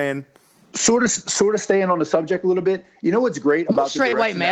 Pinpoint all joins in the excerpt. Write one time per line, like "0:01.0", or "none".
none